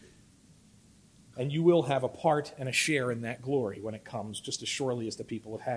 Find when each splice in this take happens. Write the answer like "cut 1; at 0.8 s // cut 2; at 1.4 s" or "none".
cut 1; at 1.3 s